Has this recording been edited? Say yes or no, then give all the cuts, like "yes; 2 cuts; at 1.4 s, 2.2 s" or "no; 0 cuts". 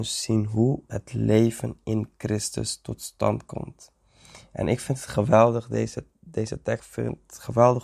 yes; 1 cut; at 6.8 s